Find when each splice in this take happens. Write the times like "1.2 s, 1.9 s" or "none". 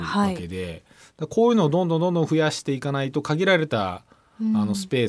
none